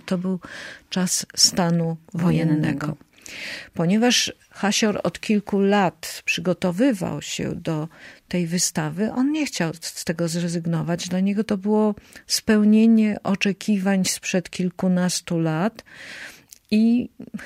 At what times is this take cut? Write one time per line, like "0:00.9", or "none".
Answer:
none